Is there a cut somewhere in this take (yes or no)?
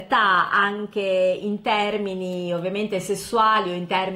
no